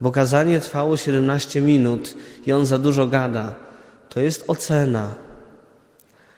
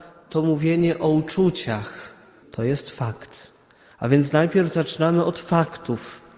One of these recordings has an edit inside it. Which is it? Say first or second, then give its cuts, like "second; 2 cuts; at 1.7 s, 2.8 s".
second; 1 cut; at 2.4 s